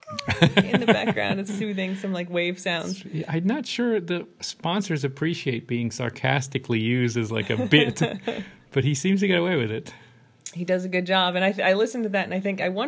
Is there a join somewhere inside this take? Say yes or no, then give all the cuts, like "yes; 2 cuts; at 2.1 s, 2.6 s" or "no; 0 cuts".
yes; 1 cut; at 1.5 s